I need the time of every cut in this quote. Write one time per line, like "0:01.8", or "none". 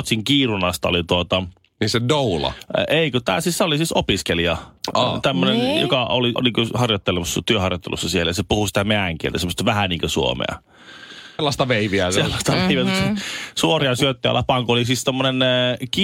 0:06.4
0:11.4